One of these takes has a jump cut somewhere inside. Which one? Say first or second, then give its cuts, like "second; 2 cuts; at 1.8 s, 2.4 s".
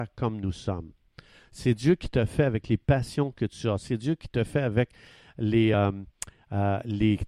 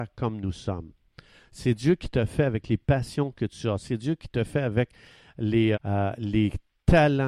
second; 1 cut; at 5.7 s